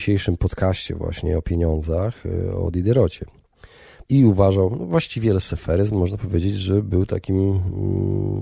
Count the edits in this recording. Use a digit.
1